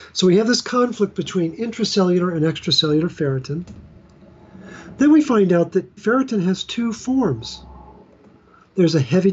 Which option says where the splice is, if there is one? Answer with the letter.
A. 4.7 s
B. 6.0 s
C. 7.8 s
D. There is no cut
B